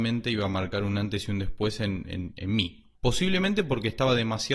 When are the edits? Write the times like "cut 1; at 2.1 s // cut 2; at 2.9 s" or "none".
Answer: cut 1; at 2.9 s